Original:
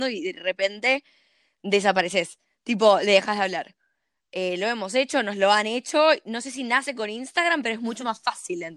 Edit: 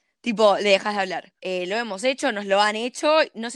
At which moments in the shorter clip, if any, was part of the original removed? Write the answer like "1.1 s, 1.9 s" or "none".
1.4 s